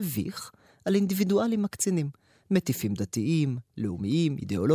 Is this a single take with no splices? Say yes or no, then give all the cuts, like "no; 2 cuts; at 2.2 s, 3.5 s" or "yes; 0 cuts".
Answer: yes; 0 cuts